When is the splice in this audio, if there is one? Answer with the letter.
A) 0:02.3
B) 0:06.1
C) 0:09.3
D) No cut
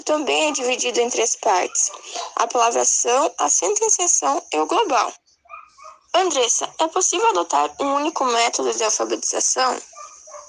D